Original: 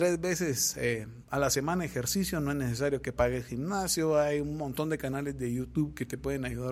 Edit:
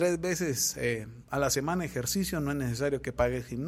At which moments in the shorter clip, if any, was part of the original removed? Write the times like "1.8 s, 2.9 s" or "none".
none

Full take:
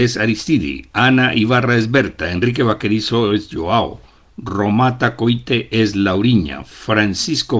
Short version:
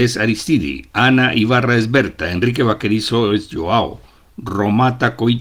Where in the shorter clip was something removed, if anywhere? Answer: none

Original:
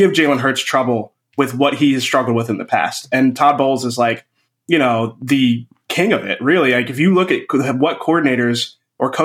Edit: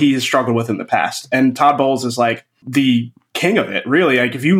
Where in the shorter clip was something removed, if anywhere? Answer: 2.6 s

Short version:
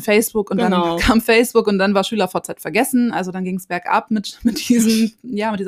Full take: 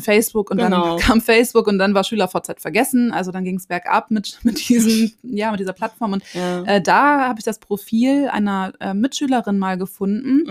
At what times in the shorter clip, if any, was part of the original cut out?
none

